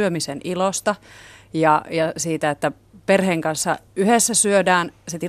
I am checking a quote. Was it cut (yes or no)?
yes